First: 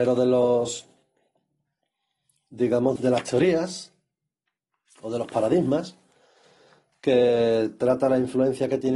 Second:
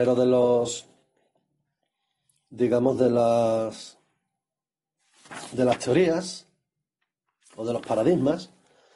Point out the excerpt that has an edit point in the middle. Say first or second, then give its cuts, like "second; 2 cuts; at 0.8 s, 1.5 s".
first; 1 cut; at 3.0 s